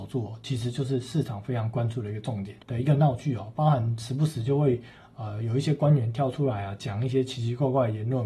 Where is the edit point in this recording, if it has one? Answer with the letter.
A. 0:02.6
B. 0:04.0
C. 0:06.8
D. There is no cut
A